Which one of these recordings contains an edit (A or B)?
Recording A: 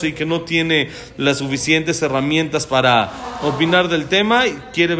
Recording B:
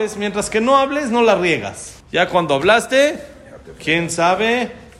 B